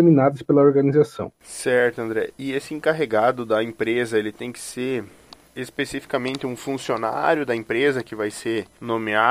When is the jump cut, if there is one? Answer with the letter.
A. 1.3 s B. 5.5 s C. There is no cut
A